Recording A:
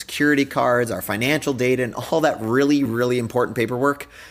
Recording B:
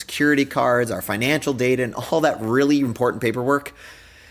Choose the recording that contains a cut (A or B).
B